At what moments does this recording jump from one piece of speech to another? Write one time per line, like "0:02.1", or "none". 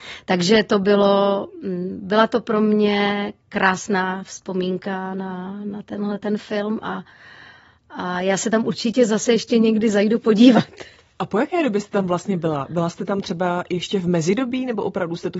none